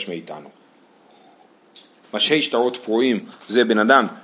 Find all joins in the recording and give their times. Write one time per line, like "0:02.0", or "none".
0:02.0